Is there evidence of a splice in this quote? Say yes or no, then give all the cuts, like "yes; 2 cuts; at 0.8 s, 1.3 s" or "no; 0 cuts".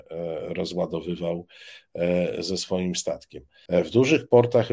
yes; 1 cut; at 3.7 s